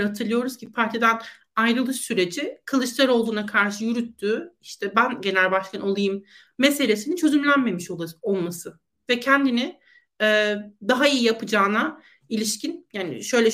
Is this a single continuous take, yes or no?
yes